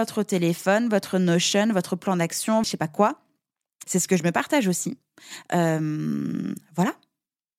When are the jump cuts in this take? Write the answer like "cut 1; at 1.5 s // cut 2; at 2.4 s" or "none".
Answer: cut 1; at 2.6 s // cut 2; at 3.8 s